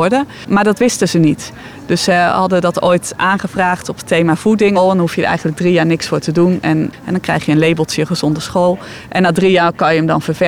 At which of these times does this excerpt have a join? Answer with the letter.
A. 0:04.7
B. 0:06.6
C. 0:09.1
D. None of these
A